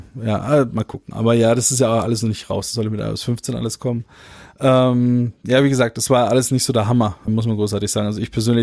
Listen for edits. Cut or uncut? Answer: cut